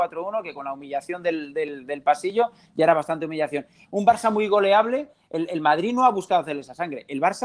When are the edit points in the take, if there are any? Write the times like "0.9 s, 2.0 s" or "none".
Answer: 3.8 s